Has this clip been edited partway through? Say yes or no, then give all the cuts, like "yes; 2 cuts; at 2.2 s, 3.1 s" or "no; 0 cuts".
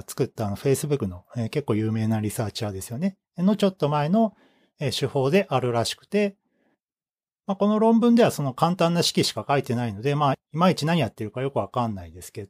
yes; 1 cut; at 1.0 s